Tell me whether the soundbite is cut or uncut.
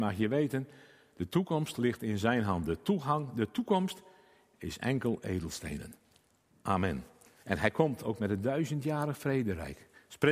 cut